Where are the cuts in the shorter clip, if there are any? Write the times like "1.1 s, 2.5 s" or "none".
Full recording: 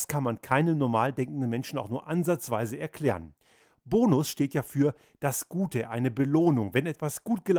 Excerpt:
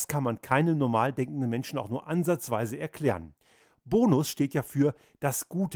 none